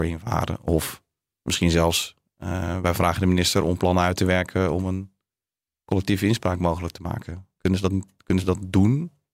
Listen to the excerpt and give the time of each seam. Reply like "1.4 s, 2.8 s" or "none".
none

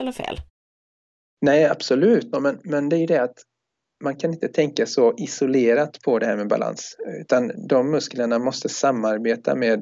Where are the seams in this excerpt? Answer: 2.3 s

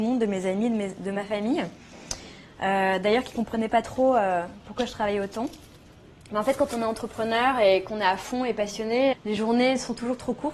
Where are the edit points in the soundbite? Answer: 9.1 s

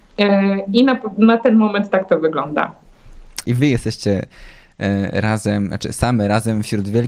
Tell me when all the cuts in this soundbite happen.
3.4 s

